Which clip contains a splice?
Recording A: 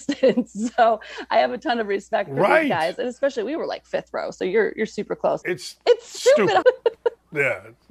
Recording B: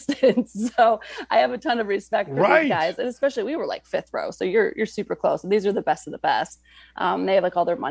A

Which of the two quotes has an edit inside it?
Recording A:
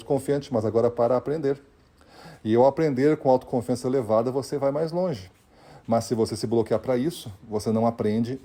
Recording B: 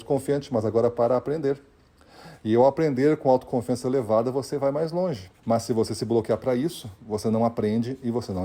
B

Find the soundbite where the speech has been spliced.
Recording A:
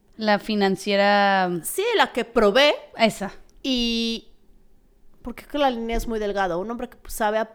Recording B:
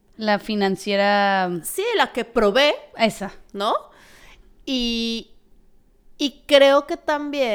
A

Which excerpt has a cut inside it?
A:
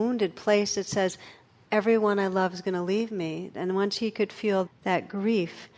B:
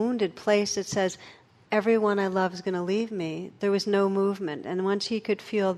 A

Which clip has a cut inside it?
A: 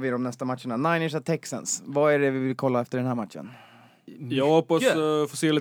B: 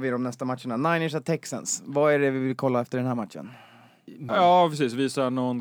B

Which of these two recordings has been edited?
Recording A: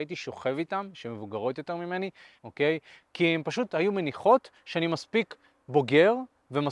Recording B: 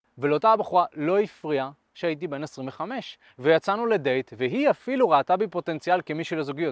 A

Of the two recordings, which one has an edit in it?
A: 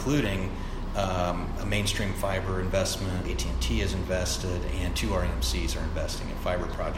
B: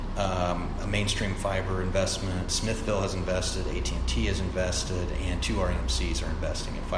A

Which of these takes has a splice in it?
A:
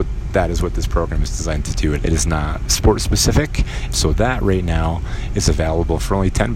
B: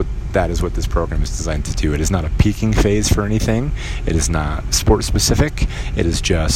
A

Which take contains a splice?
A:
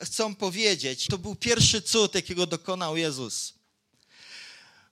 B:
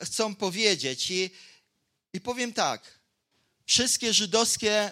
A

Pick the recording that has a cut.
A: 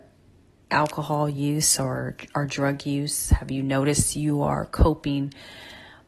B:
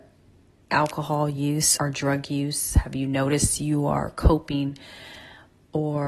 B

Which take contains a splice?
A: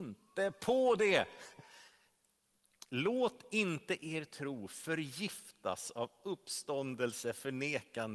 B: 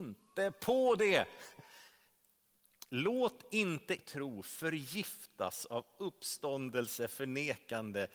B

